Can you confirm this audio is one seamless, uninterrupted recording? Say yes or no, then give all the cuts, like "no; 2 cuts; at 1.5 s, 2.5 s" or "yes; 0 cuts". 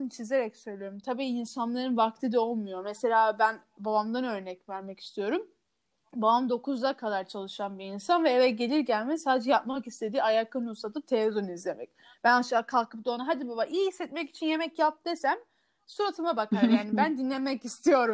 yes; 0 cuts